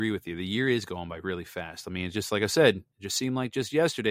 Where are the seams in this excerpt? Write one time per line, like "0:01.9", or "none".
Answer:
0:02.9